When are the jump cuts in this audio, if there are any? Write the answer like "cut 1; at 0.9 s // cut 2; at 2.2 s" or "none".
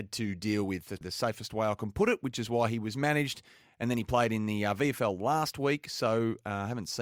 cut 1; at 1.0 s